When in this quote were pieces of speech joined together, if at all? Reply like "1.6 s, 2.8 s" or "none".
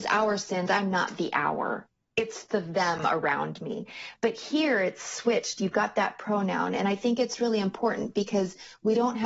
none